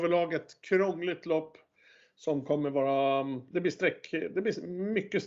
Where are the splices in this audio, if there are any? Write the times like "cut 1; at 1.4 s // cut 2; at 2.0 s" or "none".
none